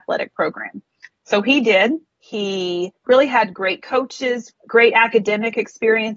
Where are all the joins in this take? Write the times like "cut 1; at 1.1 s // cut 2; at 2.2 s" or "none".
cut 1; at 2.2 s // cut 2; at 4.5 s

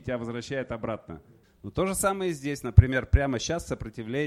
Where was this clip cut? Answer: cut 1; at 1.4 s

